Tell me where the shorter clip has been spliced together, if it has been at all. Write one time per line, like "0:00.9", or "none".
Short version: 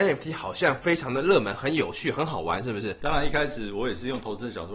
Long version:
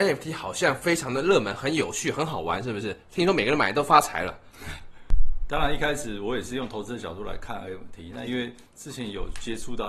0:03.0